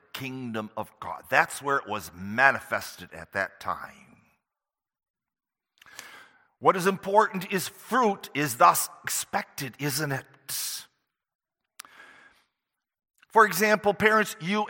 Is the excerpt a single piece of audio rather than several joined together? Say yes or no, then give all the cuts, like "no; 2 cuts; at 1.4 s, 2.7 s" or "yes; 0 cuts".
yes; 0 cuts